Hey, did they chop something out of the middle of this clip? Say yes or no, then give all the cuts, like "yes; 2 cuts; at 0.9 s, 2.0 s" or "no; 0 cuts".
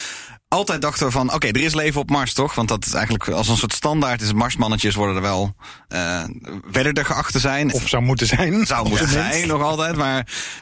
yes; 2 cuts; at 5.9 s, 7.7 s